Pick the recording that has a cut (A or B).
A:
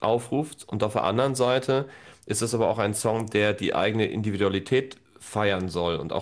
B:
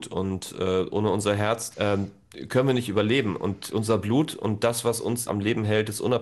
B